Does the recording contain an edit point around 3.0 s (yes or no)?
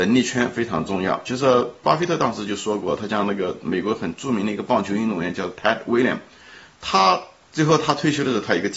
no